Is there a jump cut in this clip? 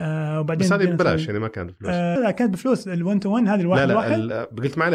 yes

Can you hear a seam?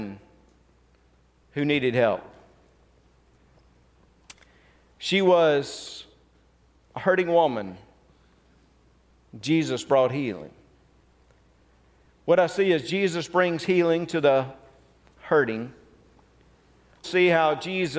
yes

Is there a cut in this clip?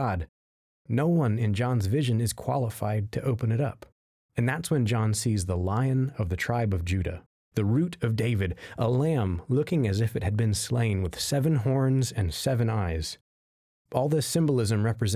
no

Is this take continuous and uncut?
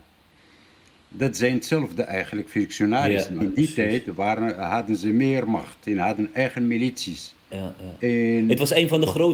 no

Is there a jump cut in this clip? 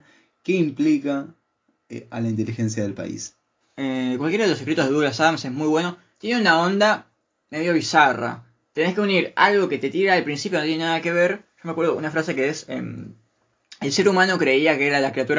yes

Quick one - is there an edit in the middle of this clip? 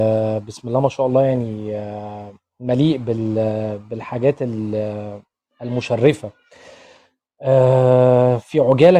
no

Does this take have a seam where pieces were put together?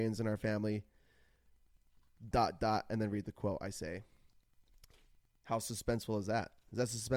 yes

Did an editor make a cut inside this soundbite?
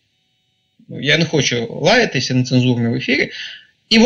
no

